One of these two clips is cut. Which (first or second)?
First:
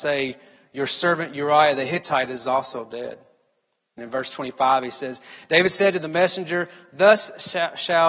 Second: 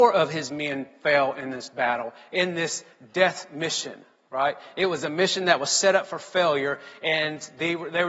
first